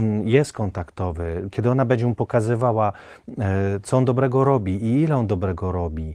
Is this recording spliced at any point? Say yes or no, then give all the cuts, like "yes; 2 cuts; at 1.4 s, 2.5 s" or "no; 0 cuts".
no; 0 cuts